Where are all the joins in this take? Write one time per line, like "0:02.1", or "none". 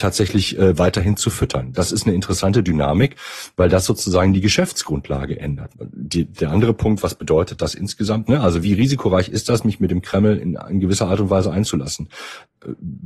0:05.7
0:08.3